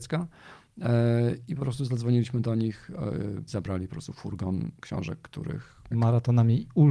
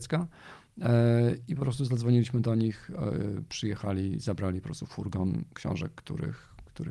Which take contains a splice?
first; 2 cuts; at 3.5 s, 5.9 s

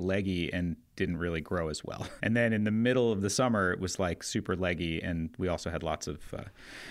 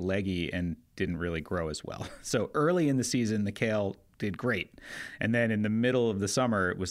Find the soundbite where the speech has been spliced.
first; 1 cut; at 2.2 s

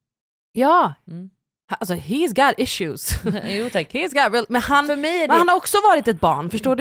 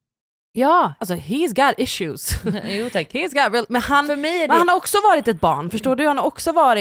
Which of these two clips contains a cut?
second; 1 cut; at 1.0 s

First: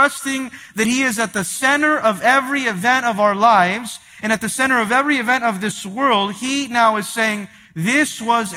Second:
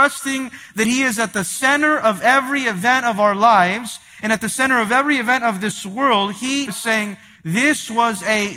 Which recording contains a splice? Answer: second; 1 cut; at 6.7 s

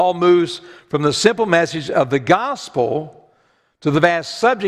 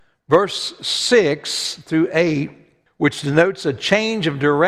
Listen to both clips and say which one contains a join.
second; 1 cut; at 2.9 s

